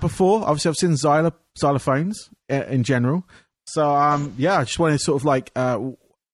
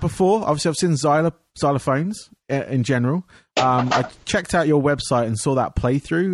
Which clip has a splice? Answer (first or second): first